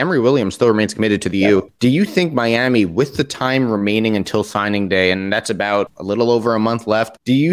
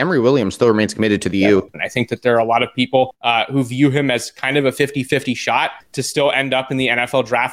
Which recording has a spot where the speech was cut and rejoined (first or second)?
second